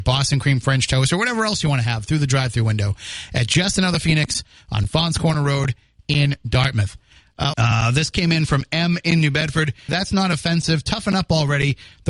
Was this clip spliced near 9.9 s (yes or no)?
yes